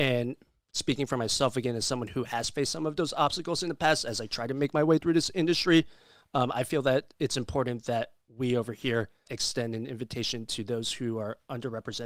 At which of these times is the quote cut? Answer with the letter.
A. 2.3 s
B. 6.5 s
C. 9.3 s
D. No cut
C